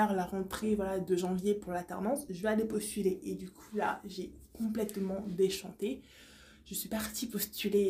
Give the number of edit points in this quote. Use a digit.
0